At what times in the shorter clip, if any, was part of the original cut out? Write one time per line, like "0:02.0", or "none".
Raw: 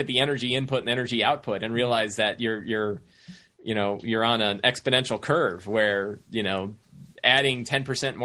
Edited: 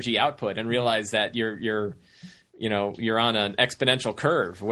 none